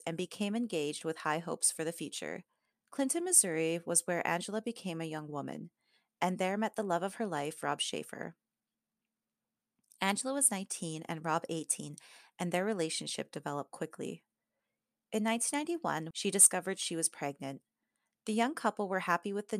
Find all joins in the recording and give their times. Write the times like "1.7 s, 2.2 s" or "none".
2.7 s, 16.1 s